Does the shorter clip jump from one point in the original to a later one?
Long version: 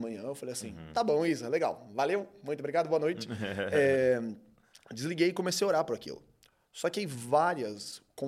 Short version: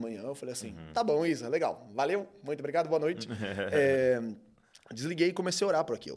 no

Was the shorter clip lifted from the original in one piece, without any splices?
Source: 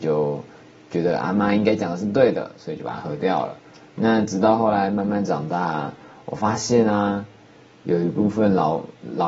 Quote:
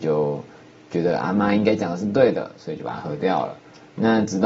yes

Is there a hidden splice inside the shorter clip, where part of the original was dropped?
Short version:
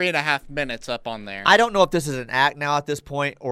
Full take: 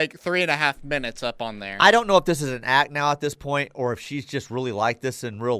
no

